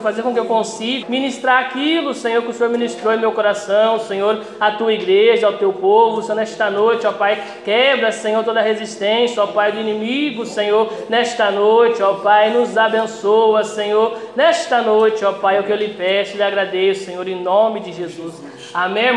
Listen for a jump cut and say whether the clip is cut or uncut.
cut